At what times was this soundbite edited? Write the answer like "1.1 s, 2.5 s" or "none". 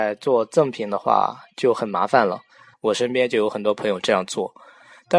2.7 s